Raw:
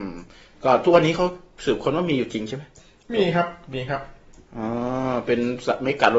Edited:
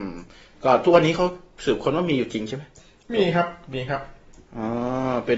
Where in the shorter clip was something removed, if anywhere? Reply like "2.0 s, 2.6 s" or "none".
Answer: none